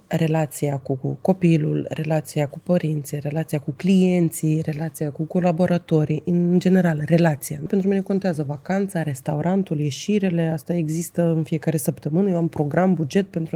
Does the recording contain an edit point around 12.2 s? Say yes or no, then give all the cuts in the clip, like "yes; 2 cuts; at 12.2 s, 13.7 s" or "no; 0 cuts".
no; 1 cut; at 7.7 s